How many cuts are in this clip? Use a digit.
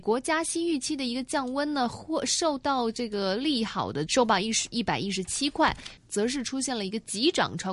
2